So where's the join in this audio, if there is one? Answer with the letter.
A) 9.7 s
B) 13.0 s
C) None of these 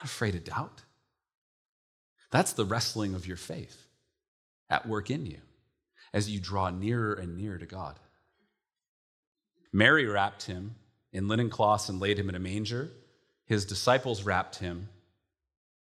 A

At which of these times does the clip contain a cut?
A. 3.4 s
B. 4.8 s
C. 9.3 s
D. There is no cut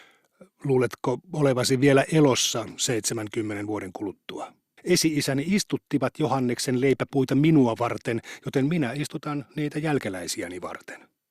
B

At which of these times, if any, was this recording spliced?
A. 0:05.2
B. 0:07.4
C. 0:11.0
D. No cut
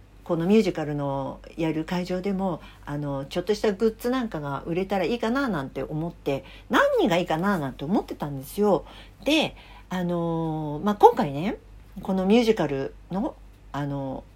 D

